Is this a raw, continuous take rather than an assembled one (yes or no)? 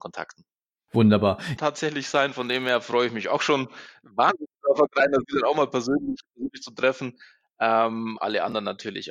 no